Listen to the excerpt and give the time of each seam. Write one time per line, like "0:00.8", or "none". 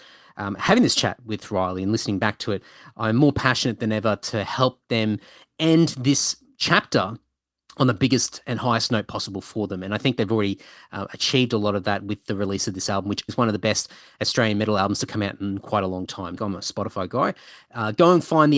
0:13.3
0:16.4